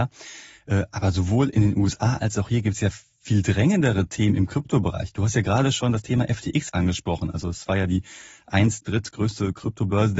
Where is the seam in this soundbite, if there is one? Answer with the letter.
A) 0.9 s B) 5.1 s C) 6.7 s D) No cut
C